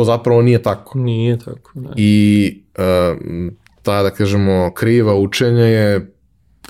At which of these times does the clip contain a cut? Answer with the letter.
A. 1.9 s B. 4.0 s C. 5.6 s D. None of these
D